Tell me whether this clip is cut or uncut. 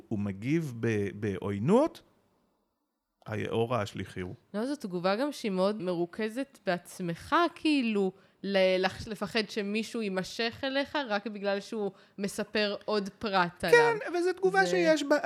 cut